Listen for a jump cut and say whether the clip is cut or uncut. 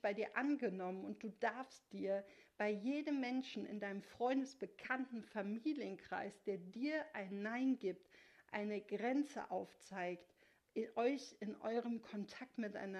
uncut